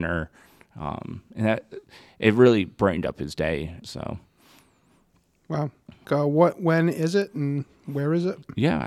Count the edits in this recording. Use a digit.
2